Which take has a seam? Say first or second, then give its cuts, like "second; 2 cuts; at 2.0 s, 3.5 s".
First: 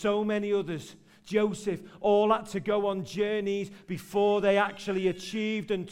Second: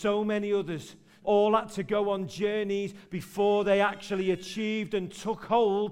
second; 1 cut; at 1.2 s